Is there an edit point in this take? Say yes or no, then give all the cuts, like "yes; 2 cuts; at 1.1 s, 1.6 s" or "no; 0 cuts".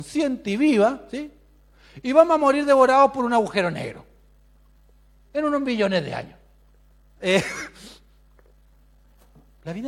yes; 1 cut; at 7.2 s